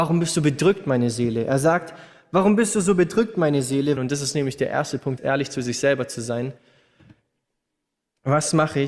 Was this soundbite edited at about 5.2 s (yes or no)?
yes